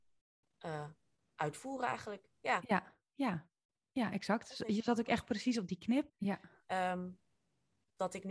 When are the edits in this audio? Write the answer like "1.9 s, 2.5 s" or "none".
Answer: 6.1 s